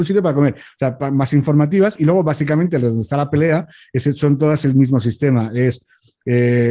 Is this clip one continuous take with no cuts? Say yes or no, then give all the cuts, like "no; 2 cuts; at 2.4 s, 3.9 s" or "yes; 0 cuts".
yes; 0 cuts